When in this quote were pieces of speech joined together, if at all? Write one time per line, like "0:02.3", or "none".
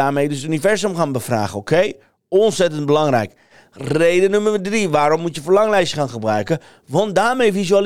none